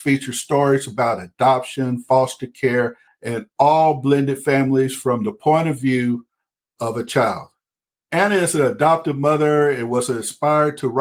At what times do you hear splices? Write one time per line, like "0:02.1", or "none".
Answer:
0:03.1
0:08.1